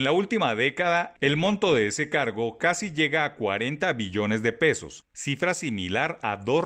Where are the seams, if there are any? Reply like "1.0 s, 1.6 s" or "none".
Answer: none